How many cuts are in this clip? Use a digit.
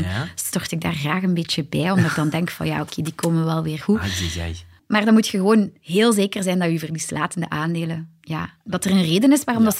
1